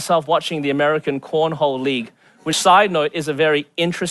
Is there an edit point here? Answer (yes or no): no